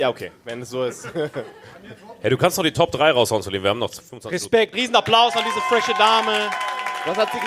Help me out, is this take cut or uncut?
cut